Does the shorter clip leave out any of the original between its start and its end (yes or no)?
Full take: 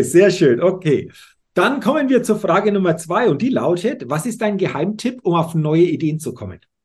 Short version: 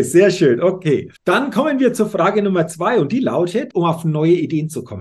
yes